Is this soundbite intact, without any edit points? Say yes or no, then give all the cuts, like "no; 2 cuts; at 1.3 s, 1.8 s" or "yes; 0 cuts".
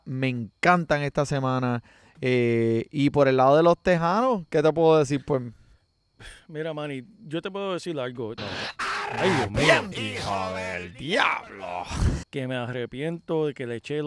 no; 3 cuts; at 8.4 s, 9.9 s, 12.2 s